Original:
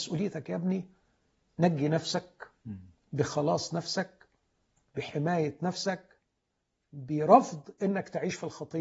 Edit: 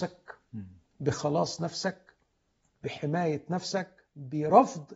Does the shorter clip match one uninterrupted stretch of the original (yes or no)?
no